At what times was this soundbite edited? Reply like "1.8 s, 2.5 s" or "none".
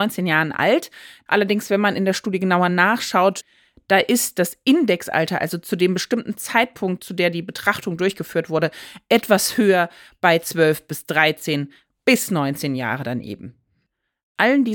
1.3 s